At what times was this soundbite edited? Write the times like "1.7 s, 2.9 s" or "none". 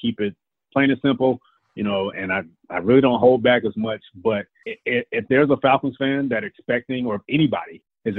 2.1 s